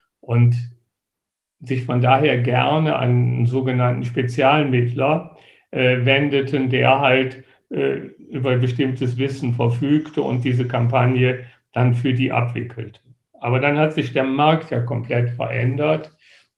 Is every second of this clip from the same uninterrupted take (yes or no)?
yes